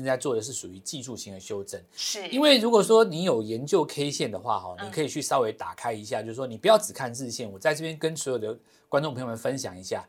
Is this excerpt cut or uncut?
uncut